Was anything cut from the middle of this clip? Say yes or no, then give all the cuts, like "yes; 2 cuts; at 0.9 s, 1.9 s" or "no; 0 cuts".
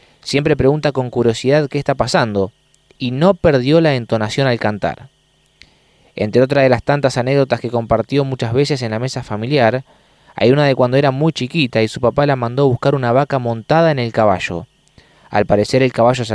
no; 0 cuts